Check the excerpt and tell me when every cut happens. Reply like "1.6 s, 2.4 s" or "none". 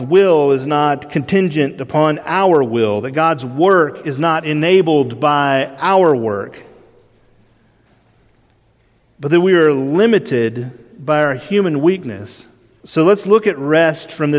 12.8 s